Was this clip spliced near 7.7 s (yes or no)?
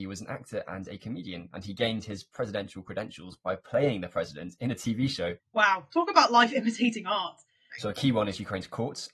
yes